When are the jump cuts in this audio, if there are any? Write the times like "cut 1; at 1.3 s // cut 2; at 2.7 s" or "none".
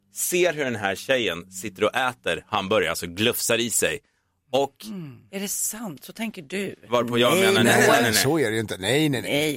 cut 1; at 5.3 s